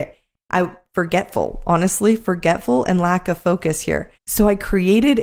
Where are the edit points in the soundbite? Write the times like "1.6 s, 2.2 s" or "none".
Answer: 4.2 s